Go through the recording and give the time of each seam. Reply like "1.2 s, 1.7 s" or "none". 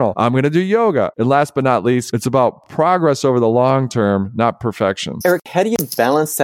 1.1 s